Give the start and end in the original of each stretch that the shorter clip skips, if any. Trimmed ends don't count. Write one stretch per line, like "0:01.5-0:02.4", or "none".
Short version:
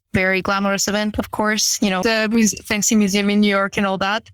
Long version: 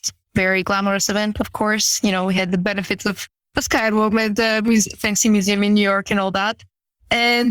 0:02.2-0:04.4

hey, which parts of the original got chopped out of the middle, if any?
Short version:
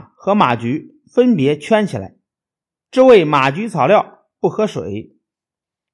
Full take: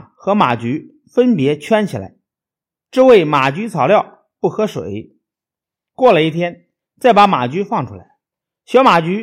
none

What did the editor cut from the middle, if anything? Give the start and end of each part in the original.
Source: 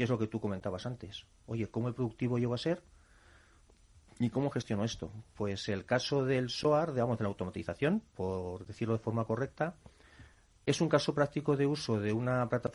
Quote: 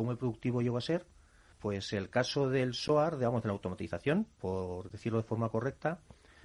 0:03.3-0:05.3

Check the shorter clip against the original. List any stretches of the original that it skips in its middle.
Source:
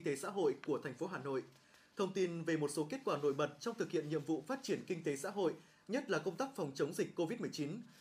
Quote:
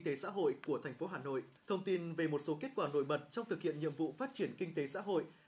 0:01.6-0:01.9

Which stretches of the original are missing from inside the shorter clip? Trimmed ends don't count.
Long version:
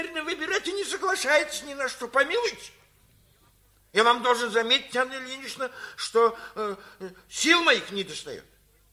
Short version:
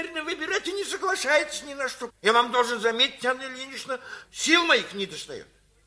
0:02.1-0:03.8
0:05.9-0:07.2

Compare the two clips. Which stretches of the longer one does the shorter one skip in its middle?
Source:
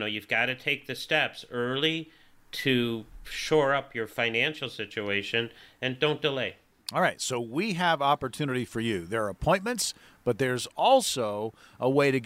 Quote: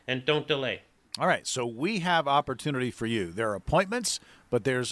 none

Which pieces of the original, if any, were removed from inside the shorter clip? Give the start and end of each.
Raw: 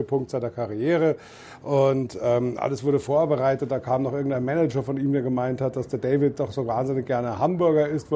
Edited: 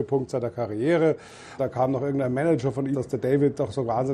0:01.6-0:03.7
0:05.0-0:05.7

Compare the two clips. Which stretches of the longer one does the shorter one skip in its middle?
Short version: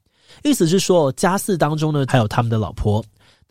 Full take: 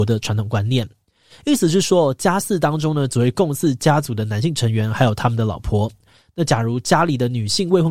0:03.1-0:04.9

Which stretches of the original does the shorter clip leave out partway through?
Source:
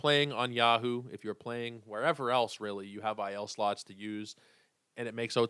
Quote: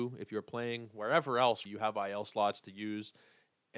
0:02.6-0:02.9

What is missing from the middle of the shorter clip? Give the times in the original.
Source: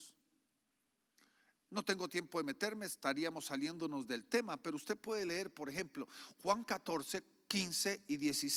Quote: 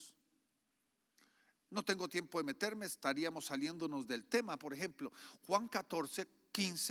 0:04.6-0:05.5

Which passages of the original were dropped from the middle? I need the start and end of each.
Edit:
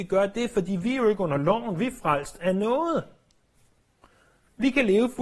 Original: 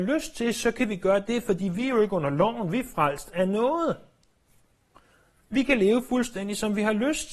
none

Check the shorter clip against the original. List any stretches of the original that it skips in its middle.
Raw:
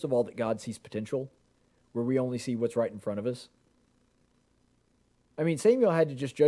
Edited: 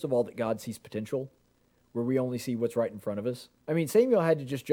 0:03.6-0:05.3

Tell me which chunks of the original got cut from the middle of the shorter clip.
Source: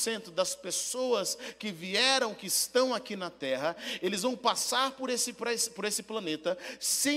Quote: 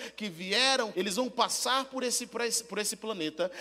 0:02.4-0:04.0

